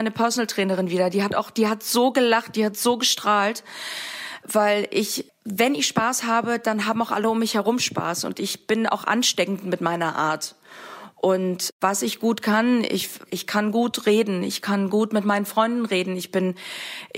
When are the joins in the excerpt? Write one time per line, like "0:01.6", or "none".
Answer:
0:13.2